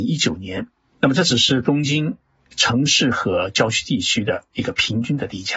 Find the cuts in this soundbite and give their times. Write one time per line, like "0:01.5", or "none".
0:00.9